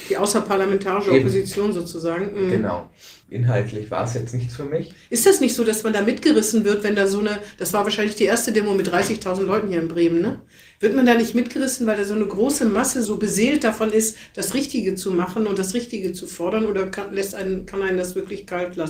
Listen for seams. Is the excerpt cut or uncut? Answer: cut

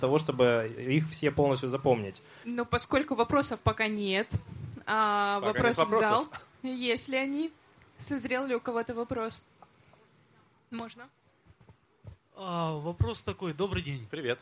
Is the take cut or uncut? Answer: cut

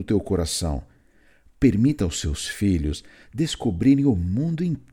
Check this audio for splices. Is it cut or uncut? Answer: uncut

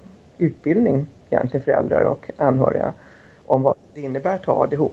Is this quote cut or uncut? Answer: uncut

